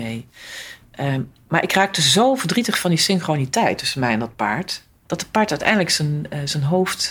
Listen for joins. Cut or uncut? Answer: cut